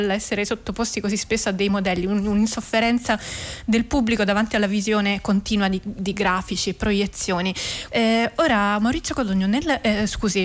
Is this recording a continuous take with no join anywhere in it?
no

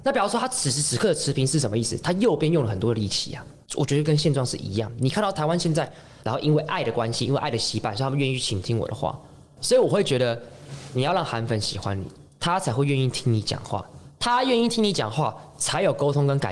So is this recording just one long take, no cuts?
no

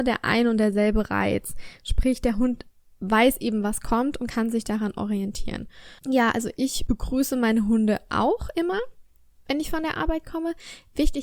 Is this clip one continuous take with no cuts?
yes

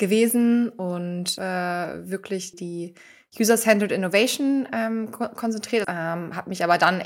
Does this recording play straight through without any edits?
no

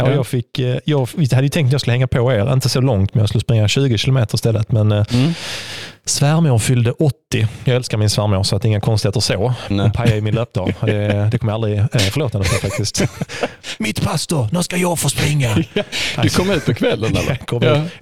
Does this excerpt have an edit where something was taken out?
yes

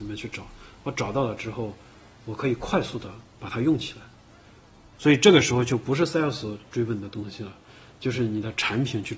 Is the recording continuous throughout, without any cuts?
no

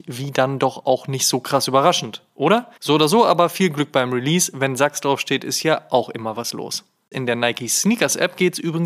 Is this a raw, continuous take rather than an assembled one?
no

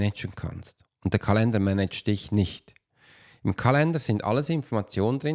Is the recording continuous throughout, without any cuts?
yes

